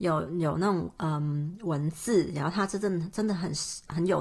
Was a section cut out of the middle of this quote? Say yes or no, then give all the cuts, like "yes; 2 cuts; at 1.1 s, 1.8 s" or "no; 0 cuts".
no; 0 cuts